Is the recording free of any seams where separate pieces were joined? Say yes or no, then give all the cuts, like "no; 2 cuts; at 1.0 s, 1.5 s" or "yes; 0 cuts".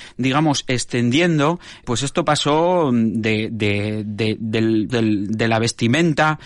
no; 2 cuts; at 1.8 s, 4.9 s